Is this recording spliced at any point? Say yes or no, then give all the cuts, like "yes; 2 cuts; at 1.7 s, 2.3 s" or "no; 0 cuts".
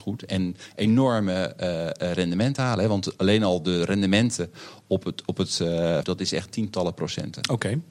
yes; 1 cut; at 6.0 s